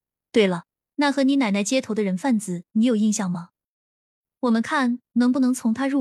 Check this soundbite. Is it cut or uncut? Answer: uncut